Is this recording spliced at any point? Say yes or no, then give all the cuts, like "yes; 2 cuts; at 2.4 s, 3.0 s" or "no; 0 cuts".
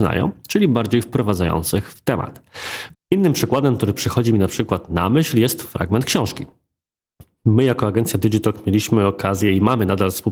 yes; 1 cut; at 2.9 s